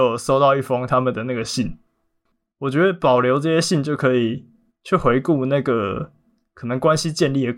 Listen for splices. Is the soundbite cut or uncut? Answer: uncut